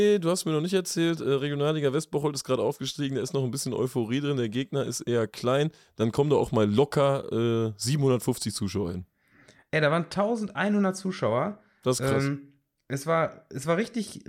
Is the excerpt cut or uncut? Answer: uncut